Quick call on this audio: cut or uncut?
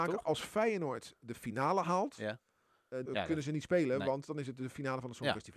cut